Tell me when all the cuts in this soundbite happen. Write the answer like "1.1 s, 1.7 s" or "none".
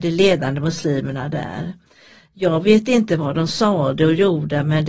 none